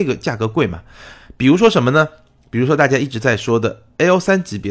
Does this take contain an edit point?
no; 0 cuts

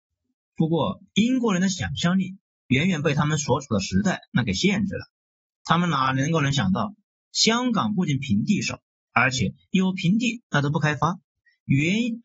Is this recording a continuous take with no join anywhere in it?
yes; 0 cuts

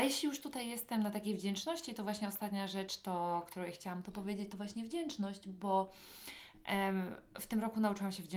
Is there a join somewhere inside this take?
no; 0 cuts

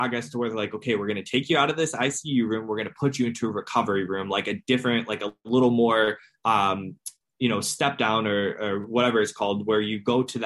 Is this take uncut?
yes; 0 cuts

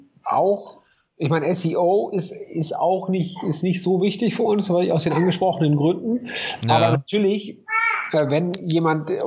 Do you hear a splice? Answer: no; 0 cuts

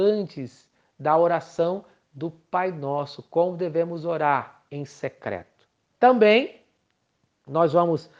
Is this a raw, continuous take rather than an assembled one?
no; 1 cut; at 4.7 s

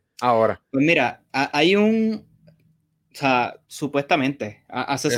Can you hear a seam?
yes; 1 cut; at 3.6 s

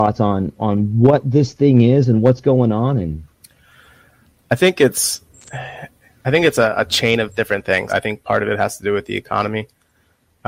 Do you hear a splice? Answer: yes; 1 cut; at 7.9 s

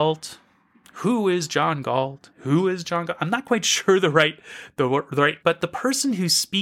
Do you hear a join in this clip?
yes; 1 cut; at 5.4 s

